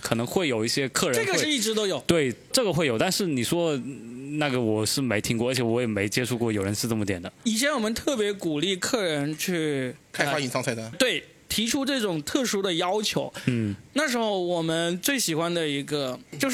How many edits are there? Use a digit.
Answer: 1